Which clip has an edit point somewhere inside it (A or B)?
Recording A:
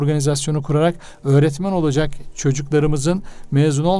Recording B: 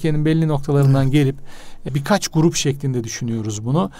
B